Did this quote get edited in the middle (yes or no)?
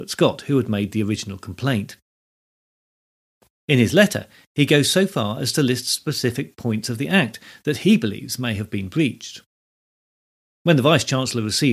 yes